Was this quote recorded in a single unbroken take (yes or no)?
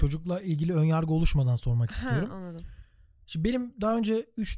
yes